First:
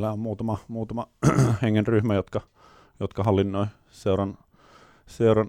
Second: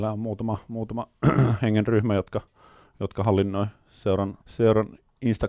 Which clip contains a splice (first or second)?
second